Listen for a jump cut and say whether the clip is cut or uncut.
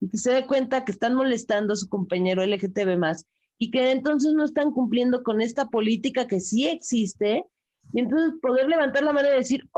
uncut